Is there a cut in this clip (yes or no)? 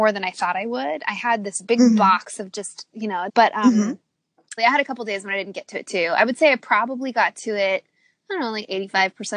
yes